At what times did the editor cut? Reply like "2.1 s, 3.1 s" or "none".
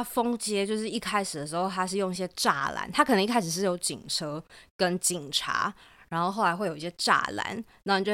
5.0 s